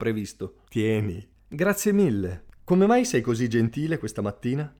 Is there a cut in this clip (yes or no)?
yes